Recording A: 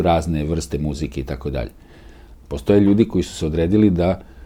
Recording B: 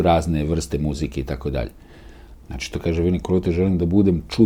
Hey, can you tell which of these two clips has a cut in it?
B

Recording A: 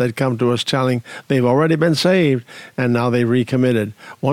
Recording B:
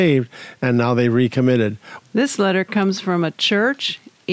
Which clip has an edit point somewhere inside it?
B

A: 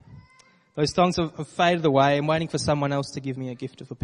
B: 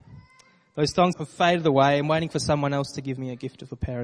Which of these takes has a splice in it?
B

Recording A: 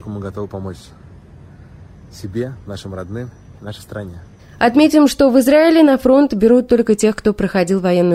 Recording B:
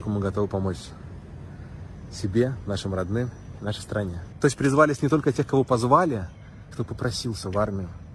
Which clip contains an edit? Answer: B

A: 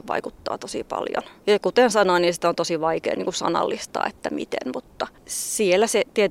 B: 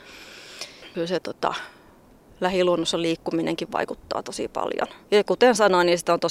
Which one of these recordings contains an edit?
A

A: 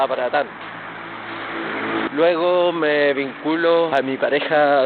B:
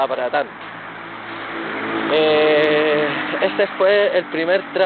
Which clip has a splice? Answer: A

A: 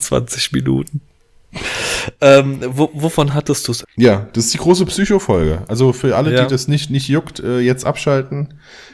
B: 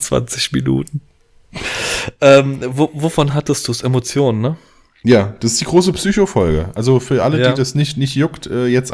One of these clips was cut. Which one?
A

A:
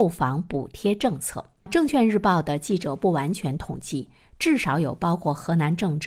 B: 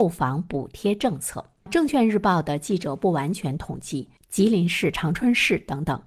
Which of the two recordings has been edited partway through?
B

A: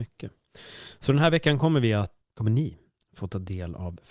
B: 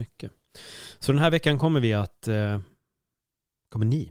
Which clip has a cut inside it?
A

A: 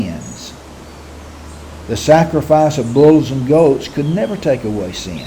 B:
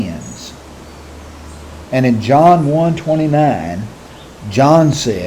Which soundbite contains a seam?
B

